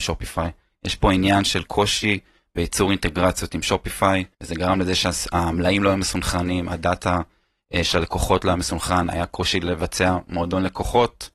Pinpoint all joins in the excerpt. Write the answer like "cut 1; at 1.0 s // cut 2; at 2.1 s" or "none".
cut 1; at 4.3 s